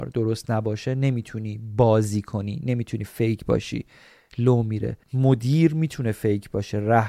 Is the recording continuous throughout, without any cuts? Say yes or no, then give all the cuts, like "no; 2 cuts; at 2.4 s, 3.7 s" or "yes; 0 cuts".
no; 1 cut; at 5.0 s